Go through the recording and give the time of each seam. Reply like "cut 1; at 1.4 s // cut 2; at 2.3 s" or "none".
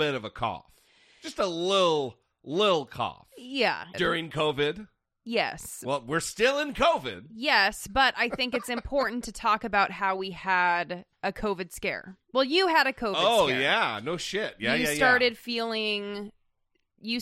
cut 1; at 3.9 s